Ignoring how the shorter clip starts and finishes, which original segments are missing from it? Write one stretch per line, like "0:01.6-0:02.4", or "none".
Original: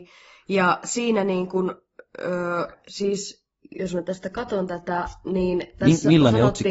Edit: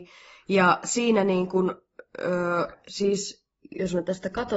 none